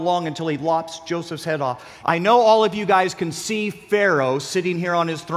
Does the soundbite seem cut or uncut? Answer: cut